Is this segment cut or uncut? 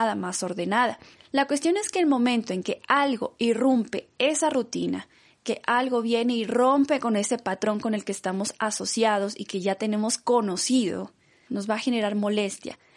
cut